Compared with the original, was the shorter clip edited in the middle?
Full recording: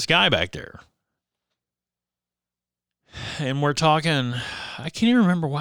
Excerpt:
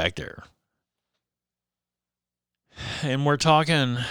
no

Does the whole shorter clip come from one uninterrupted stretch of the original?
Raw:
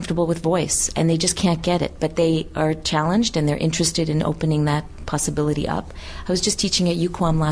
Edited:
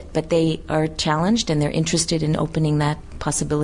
yes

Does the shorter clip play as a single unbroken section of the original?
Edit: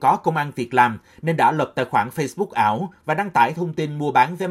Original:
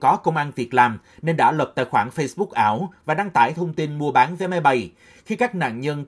yes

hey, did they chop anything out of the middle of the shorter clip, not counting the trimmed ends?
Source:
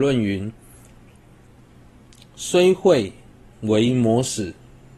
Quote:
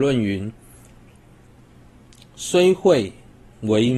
no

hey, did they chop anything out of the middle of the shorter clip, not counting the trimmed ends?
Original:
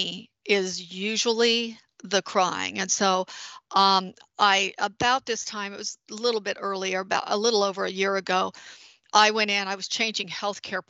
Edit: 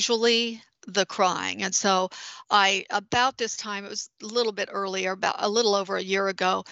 yes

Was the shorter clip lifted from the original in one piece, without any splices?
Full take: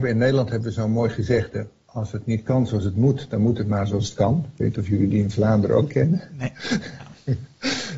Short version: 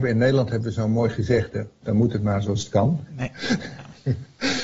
no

